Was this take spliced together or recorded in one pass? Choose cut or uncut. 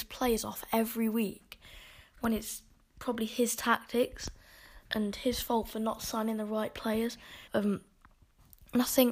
cut